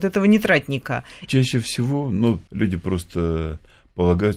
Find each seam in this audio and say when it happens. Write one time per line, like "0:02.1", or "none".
0:01.3
0:02.5